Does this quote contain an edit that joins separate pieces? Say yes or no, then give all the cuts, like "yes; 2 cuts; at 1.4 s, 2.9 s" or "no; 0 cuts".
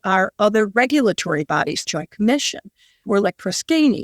yes; 1 cut; at 1.8 s